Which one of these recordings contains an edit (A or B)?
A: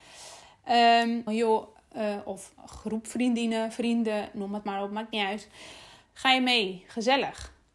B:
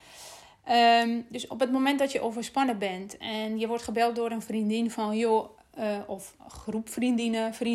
A